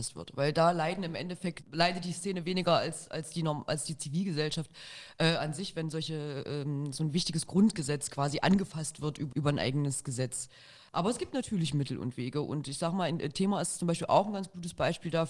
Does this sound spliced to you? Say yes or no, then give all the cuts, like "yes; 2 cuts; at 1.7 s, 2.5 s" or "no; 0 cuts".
yes; 1 cut; at 9.3 s